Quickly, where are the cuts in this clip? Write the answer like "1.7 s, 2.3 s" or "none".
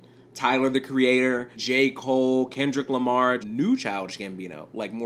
1.5 s, 3.4 s